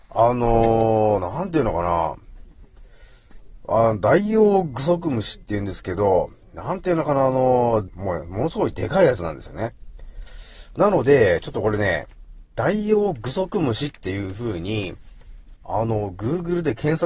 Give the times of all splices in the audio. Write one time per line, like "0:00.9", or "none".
0:07.9